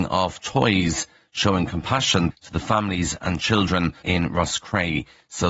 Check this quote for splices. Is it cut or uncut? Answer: cut